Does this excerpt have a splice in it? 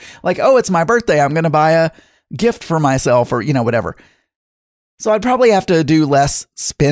no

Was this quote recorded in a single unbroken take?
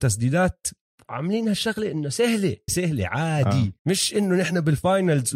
no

